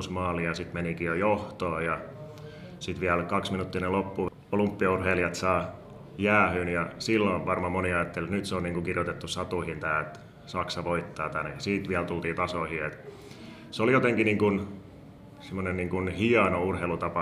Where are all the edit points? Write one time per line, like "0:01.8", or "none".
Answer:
none